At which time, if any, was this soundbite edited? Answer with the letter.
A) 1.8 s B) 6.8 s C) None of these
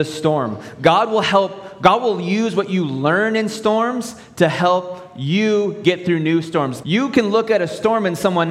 B